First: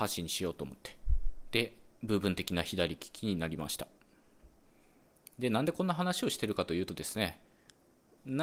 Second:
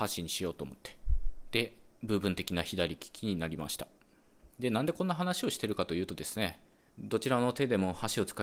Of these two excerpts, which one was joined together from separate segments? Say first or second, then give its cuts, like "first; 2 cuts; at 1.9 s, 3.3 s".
second; 2 cuts; at 4.5 s, 6.9 s